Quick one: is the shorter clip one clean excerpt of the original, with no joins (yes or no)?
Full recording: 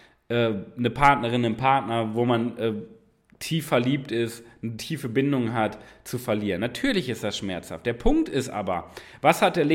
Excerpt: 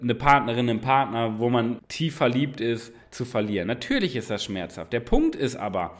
no